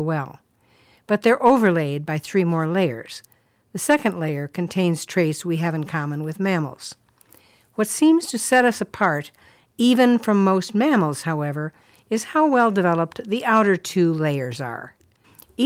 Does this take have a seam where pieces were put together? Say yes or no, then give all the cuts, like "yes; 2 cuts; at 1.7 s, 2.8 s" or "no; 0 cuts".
no; 0 cuts